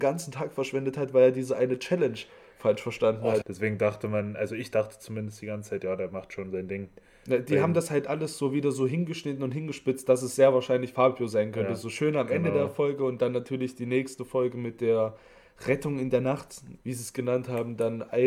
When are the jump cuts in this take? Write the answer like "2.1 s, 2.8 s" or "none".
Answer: 3.4 s, 16.8 s